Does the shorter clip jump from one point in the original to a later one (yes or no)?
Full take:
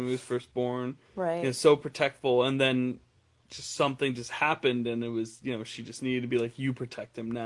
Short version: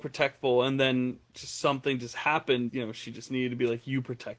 yes